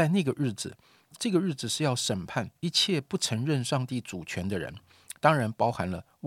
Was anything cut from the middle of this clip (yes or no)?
yes